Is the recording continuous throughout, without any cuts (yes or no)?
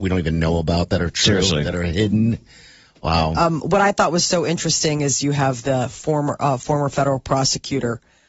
yes